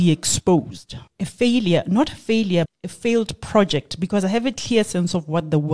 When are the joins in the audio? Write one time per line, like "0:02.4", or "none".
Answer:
0:01.1
0:02.6

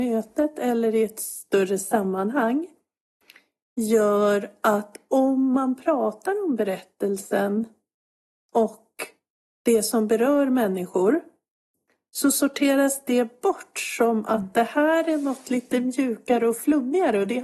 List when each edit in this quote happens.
none

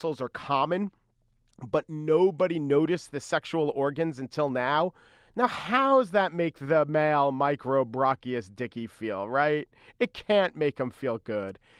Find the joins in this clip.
none

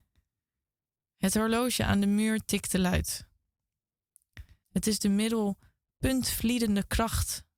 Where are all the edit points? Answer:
0:04.6

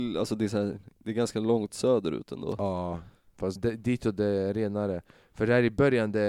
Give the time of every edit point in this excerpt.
0:03.6

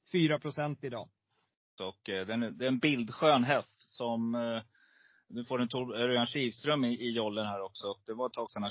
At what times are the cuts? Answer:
0:01.8

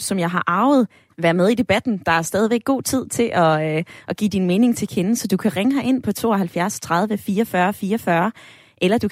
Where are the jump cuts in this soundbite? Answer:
0:01.1

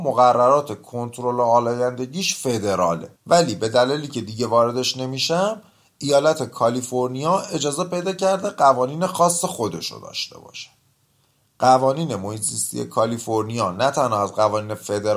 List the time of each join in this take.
0:03.2

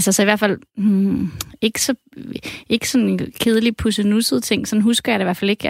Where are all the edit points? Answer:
none

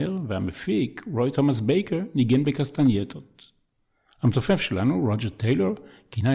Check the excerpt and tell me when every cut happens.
none

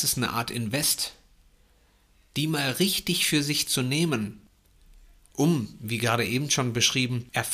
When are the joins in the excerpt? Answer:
none

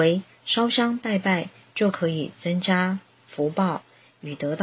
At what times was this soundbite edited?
none

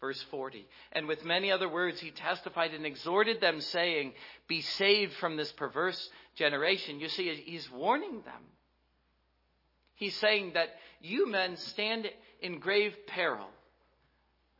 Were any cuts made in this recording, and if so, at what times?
none

